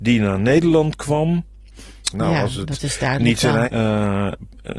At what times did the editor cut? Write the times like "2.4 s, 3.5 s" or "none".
2.1 s, 3.6 s